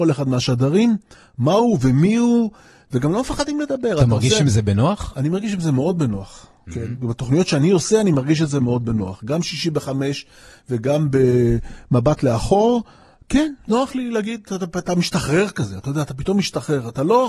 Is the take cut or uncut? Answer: uncut